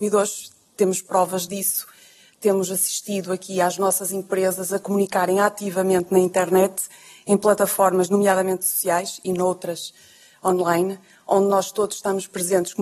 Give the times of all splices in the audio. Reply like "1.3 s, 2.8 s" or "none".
none